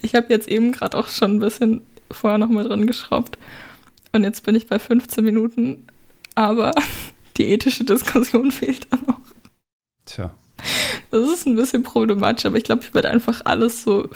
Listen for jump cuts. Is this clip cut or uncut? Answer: uncut